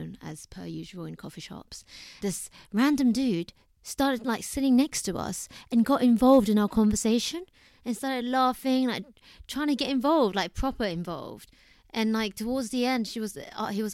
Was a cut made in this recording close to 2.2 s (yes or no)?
yes